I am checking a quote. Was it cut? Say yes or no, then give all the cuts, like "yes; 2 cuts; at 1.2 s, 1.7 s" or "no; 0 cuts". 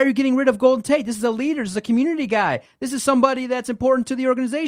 no; 0 cuts